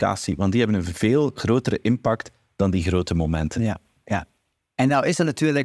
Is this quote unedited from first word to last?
yes; 0 cuts

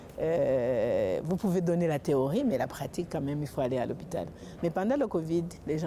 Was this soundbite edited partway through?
yes; 1 cut; at 4.6 s

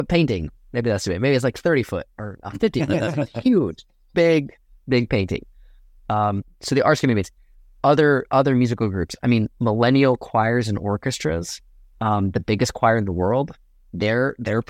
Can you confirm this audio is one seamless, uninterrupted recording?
no; 1 cut; at 4.1 s

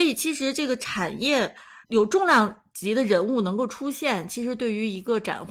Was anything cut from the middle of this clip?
yes; 1 cut; at 1.8 s

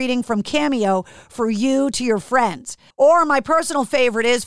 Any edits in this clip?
yes; 1 cut; at 2.9 s

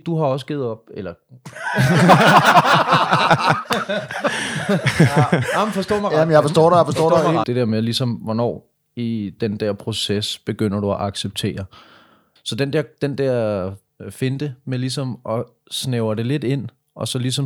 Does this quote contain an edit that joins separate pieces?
yes; 2 cuts; at 7.4 s, 12.4 s

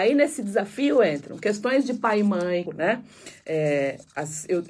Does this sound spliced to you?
yes; 1 cut; at 2.7 s

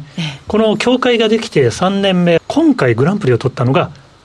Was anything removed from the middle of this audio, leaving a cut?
yes; 1 cut; at 2.4 s

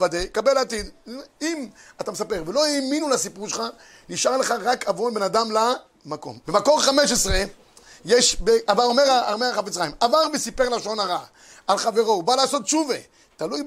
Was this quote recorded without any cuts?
no; 1 cut; at 6.4 s

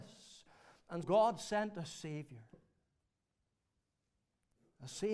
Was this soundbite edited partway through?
yes; 1 cut; at 1.0 s

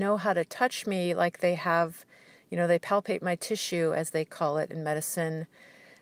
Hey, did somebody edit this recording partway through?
no; 0 cuts

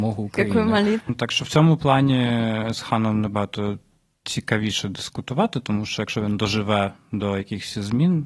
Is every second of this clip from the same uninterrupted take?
no; 1 cut; at 1.0 s

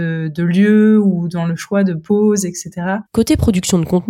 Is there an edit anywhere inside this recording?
yes; 1 cut; at 3.1 s

